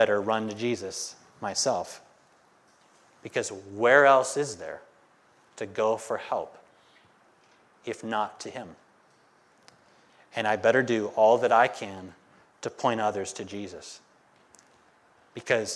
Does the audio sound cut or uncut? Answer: uncut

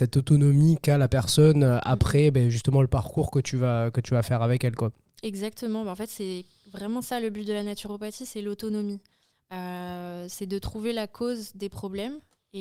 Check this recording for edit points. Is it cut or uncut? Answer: uncut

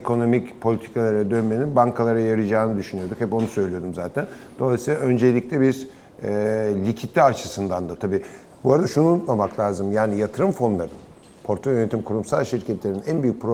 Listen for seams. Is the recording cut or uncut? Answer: uncut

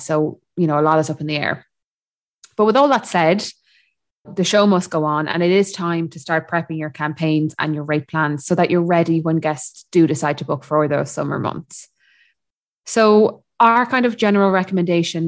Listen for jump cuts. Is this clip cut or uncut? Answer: cut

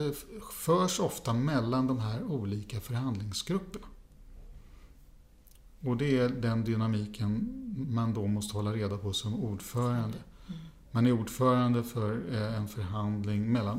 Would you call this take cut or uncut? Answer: uncut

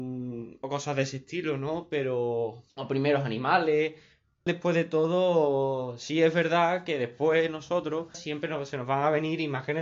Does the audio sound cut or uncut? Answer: cut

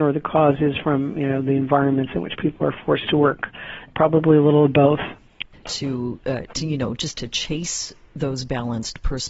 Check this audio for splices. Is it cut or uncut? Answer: cut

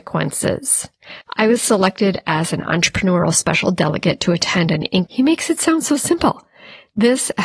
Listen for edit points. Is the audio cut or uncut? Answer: cut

